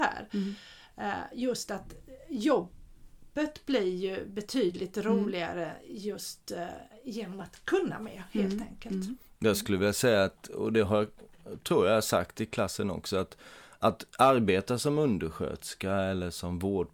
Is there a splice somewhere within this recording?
no; 0 cuts

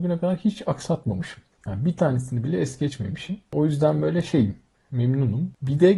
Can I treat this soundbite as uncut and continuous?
yes; 0 cuts

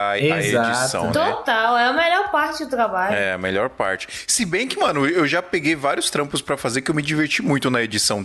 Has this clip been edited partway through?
no; 0 cuts

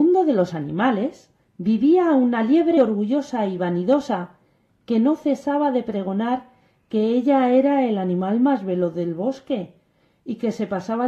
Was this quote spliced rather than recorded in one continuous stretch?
yes; 1 cut; at 2.8 s

